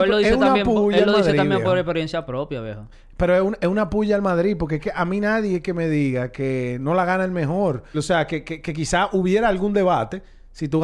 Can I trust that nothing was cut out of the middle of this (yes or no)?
no